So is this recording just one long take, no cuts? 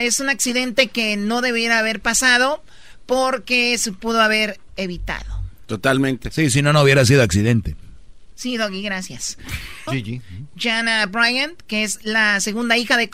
no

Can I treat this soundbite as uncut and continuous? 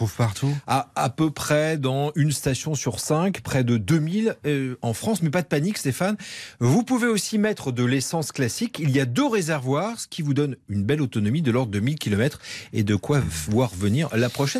yes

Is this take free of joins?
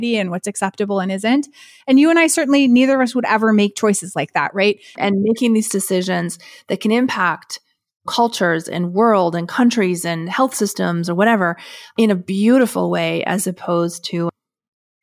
no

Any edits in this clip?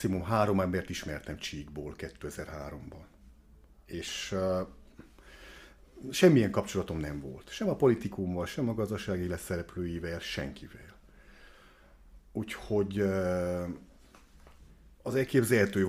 no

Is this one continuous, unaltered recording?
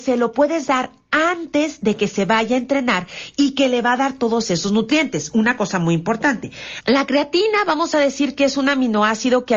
no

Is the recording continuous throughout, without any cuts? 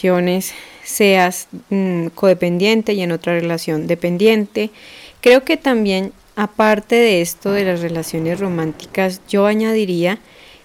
yes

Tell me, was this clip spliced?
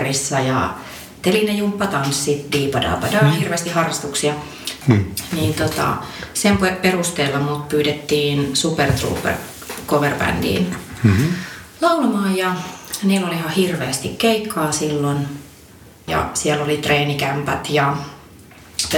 yes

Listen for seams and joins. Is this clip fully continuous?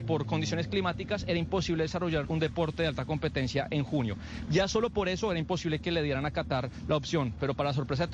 no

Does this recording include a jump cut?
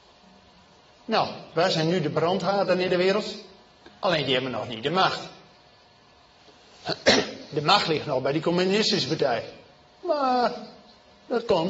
yes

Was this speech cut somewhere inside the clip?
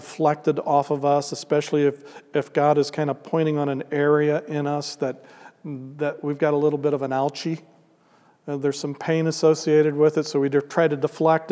no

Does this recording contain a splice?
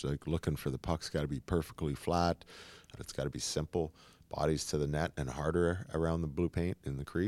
yes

